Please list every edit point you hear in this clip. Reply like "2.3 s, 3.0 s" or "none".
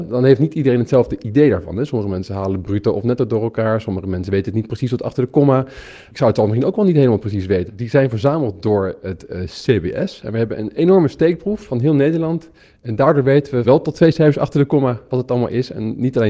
7.7 s